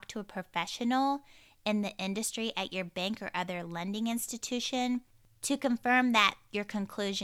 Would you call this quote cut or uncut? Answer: uncut